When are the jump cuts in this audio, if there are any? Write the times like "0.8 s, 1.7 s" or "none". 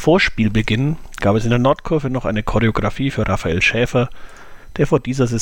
none